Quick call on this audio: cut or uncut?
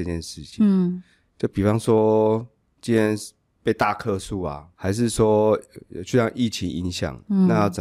cut